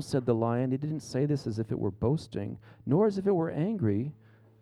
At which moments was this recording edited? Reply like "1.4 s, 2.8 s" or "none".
none